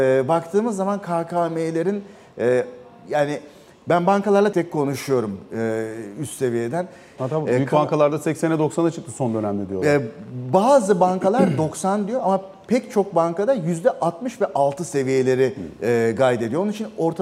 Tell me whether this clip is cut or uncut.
cut